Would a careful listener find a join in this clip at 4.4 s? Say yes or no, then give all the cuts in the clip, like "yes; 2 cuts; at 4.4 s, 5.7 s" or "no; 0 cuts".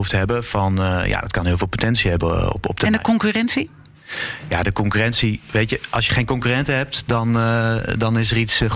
no; 0 cuts